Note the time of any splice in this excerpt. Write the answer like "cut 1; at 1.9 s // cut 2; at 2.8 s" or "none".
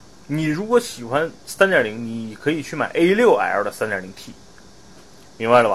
none